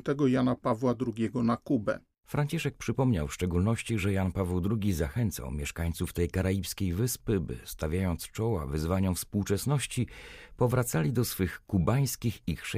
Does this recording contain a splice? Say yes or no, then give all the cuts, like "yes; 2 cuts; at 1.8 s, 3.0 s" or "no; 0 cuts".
yes; 1 cut; at 2.1 s